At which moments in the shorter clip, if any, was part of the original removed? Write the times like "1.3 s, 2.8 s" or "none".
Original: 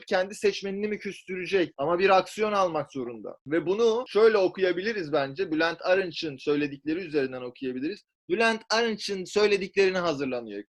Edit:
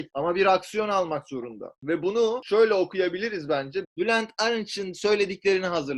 3.8 s